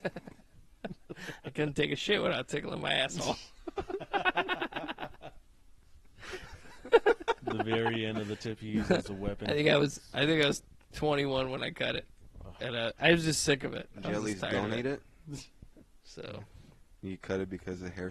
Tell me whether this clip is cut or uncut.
cut